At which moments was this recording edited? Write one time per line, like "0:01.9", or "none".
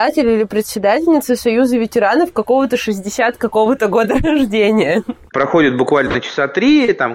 0:05.3